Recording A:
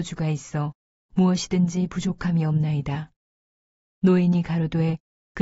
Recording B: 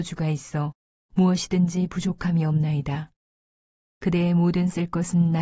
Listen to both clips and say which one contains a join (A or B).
B